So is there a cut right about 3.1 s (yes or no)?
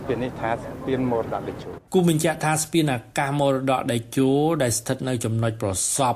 no